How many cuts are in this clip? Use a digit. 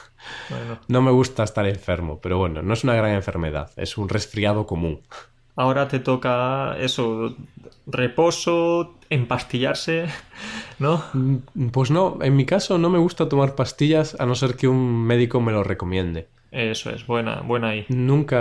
0